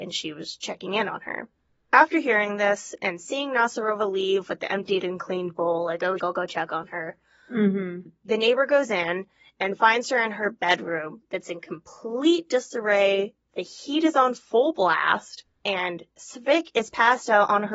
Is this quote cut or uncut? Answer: cut